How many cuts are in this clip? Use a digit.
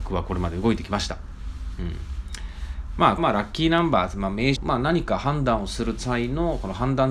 2